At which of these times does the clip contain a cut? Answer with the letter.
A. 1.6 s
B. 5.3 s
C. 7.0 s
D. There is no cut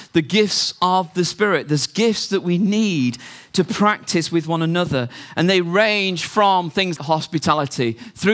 C